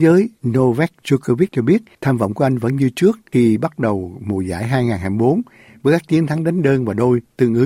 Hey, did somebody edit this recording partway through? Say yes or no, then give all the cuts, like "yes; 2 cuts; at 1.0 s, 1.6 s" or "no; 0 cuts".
no; 0 cuts